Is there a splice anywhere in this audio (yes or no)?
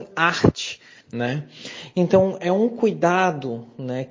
yes